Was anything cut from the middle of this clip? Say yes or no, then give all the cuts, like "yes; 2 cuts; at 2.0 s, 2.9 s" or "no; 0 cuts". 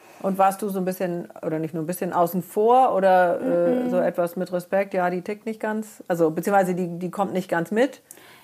no; 0 cuts